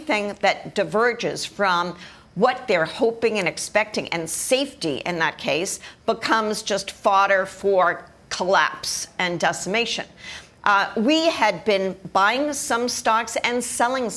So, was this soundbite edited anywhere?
no; 0 cuts

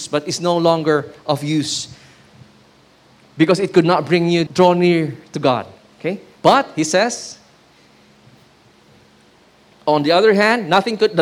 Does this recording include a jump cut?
yes; 2 cuts; at 4.5 s, 6.4 s

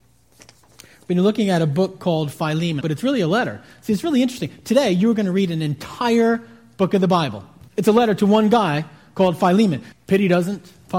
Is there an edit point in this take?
yes; 3 cuts; at 2.8 s, 7.7 s, 9.9 s

